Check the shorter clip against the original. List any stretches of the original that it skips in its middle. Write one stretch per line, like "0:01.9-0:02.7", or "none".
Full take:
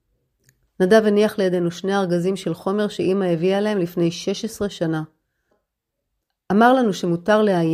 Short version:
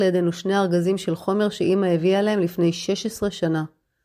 none